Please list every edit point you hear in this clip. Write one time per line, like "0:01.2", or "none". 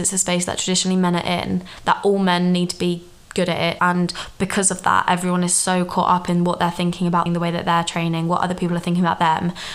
0:03.8
0:07.3